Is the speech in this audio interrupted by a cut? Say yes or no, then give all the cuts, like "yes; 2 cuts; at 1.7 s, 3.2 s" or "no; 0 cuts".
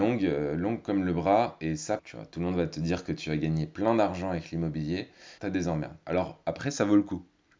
yes; 2 cuts; at 2.0 s, 5.4 s